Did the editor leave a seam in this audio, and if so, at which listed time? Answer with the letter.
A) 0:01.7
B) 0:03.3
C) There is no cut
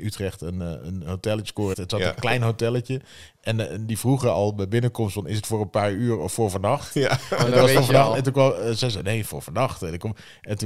A